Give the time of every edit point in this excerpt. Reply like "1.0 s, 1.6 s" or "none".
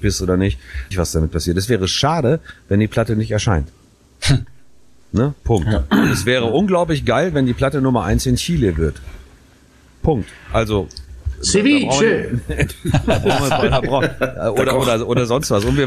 0.9 s